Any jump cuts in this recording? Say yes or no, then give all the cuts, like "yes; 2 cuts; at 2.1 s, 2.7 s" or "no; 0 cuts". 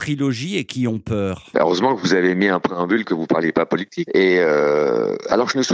yes; 1 cut; at 4.1 s